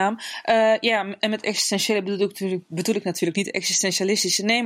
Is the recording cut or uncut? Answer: cut